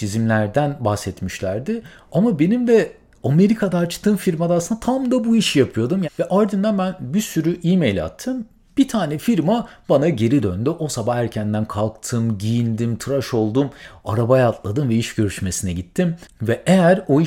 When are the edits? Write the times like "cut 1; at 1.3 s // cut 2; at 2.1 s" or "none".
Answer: cut 1; at 6.0 s